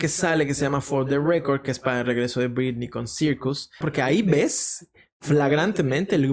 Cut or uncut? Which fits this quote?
cut